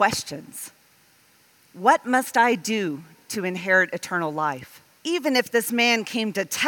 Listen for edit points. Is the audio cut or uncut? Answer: cut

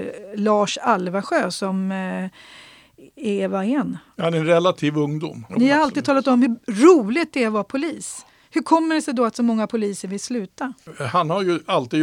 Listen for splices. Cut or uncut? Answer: cut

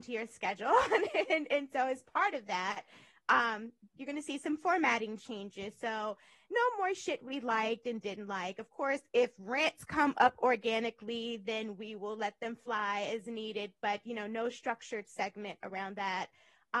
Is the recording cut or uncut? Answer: uncut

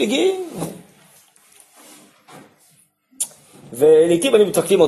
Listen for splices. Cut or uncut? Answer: uncut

